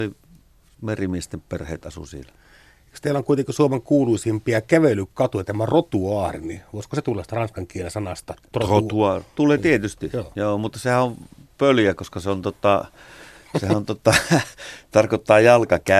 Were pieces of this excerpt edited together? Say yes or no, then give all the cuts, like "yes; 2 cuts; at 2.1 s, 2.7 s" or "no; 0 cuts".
no; 0 cuts